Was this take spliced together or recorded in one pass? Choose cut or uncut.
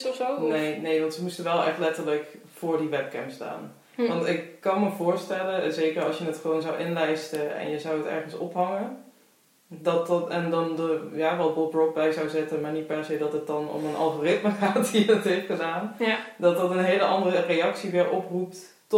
uncut